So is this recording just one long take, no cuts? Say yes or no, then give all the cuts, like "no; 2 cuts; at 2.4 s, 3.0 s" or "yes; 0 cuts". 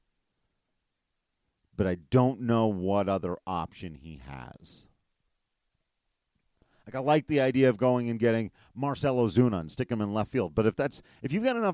yes; 0 cuts